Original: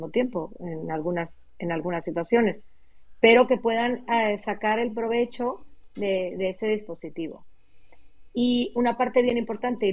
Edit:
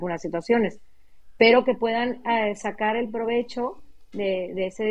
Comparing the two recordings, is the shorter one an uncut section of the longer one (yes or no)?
yes